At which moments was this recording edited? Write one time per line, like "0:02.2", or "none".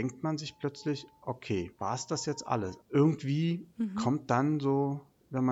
0:01.7
0:02.8